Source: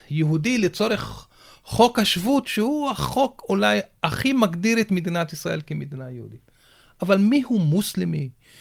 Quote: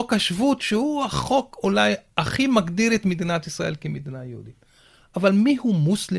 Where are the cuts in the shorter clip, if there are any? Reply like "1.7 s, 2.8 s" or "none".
none